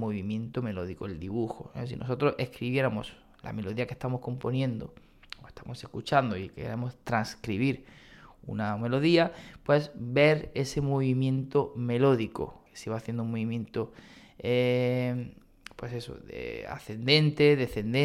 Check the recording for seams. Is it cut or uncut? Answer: cut